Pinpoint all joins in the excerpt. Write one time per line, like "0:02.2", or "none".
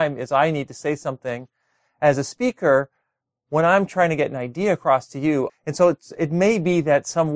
0:05.5